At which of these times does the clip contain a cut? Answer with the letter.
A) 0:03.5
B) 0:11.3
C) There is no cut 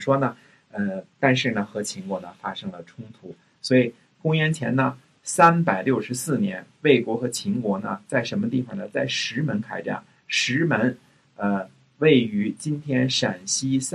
A